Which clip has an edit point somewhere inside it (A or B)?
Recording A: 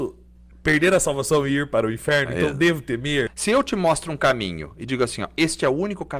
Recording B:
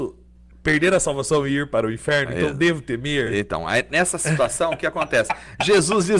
A